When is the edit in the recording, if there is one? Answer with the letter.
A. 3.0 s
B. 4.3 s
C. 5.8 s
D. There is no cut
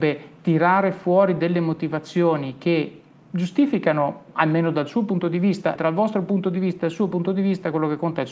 C